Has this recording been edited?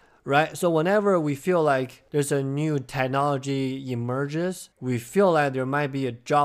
yes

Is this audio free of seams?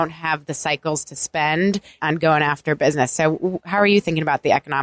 no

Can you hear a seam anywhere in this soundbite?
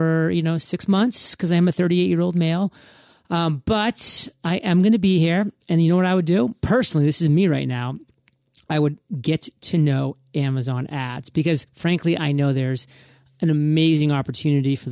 no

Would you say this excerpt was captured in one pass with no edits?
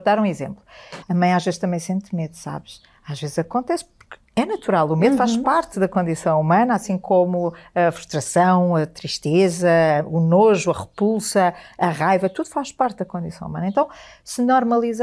no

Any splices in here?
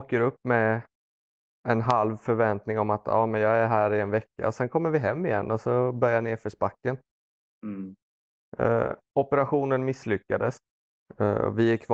no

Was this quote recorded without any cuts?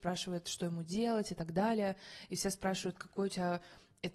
yes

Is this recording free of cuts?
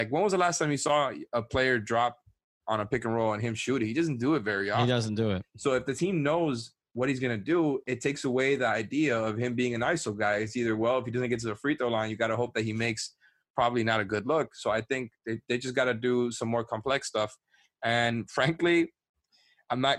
yes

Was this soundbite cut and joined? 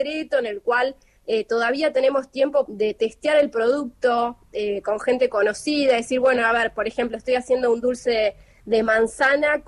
yes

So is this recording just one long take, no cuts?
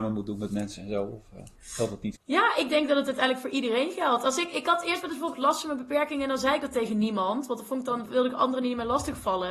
yes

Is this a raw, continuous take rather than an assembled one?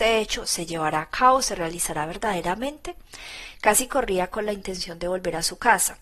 no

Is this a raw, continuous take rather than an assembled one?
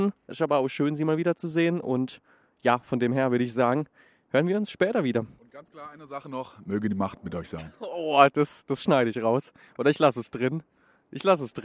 yes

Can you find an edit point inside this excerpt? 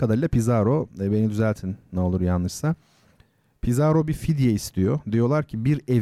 no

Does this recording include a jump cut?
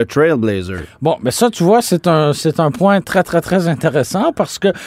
no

